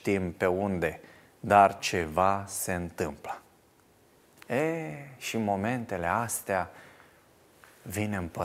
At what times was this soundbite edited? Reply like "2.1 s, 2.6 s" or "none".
1.8 s